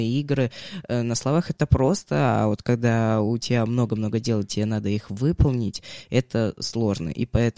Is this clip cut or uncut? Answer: uncut